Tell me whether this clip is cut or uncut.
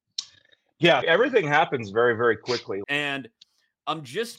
cut